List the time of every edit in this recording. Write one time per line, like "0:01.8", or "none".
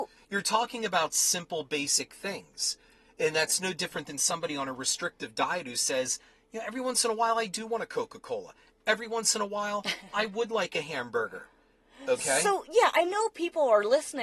none